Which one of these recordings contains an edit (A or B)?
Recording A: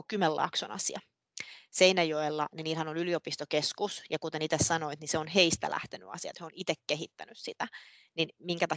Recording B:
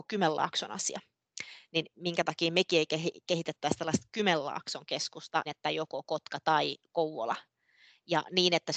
B